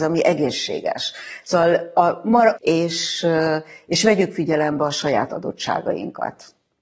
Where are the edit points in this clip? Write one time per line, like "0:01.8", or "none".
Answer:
0:01.4
0:02.6